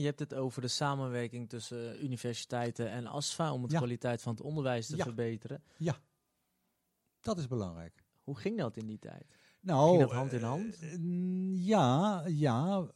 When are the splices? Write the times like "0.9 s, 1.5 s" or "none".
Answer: none